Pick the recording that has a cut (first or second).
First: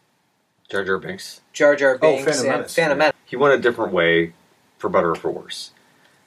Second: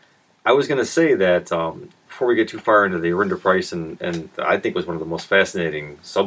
first